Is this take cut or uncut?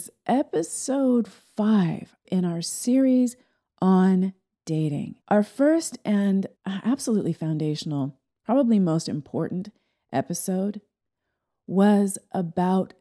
cut